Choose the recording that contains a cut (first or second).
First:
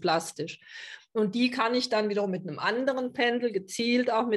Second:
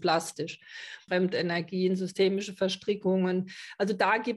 second